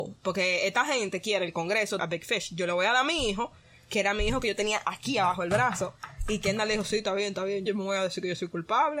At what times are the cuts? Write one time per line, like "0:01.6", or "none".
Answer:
0:02.0
0:07.7